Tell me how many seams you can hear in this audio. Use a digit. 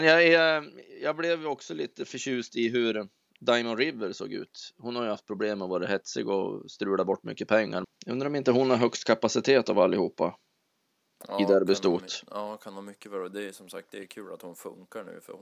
1